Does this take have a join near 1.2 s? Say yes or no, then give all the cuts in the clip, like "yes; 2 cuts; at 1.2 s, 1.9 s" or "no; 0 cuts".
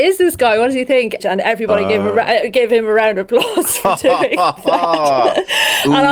yes; 1 cut; at 1.2 s